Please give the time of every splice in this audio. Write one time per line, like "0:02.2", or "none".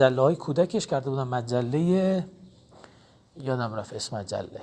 none